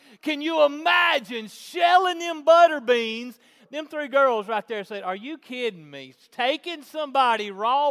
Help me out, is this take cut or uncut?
cut